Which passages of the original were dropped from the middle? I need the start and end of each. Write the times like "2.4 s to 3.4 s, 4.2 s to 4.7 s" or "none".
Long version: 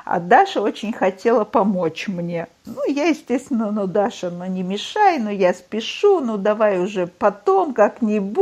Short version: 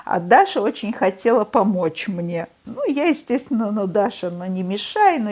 none